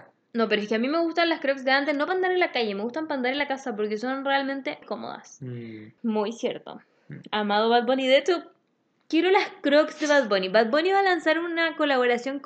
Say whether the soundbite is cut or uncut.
cut